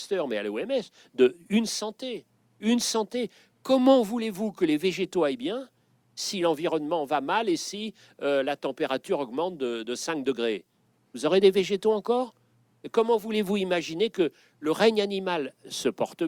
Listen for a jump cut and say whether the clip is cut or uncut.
uncut